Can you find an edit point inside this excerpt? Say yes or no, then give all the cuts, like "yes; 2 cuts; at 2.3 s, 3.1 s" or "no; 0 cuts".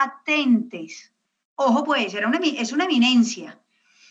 no; 0 cuts